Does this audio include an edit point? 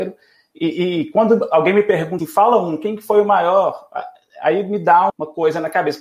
yes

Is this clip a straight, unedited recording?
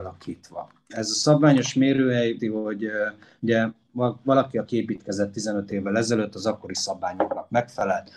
no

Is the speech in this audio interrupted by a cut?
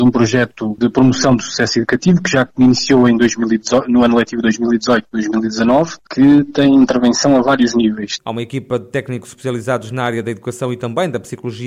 yes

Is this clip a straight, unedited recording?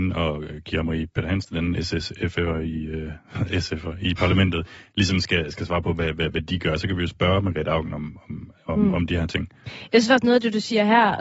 yes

